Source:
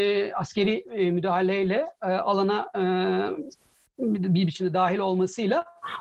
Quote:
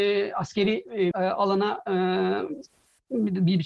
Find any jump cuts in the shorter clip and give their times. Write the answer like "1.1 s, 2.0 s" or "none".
1.1 s